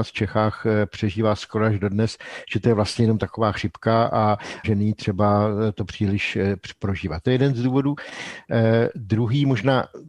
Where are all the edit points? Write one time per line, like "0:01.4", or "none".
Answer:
0:04.6